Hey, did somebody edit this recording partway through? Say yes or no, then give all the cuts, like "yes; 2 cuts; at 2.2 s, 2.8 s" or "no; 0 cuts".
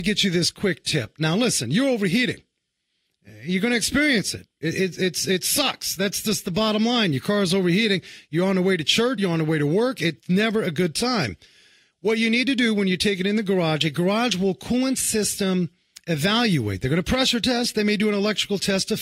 yes; 1 cut; at 9.2 s